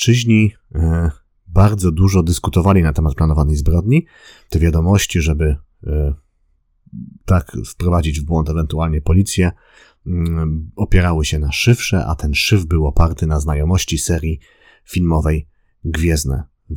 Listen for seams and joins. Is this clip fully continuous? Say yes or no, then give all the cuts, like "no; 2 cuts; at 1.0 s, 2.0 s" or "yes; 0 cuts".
no; 1 cut; at 4.5 s